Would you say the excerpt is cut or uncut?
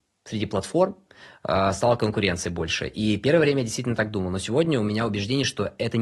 uncut